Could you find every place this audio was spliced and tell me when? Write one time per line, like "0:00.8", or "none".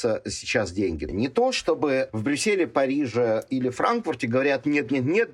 0:01.1